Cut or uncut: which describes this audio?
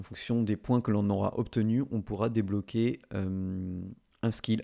uncut